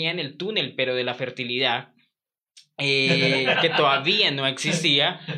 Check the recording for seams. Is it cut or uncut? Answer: cut